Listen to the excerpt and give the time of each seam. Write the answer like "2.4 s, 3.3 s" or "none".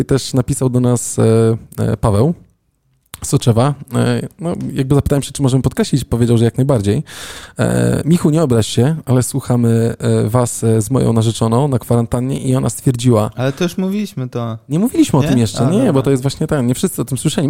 none